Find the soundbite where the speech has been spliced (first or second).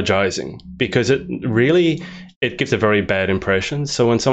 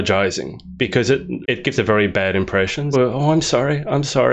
second